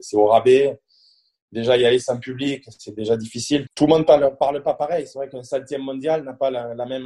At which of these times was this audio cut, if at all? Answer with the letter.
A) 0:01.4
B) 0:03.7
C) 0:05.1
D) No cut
B